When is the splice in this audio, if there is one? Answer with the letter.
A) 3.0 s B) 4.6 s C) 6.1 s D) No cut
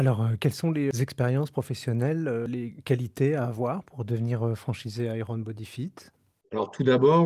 D